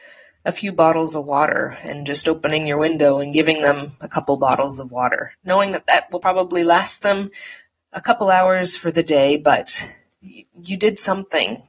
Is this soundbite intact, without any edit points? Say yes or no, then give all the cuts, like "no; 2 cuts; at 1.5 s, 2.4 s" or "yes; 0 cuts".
yes; 0 cuts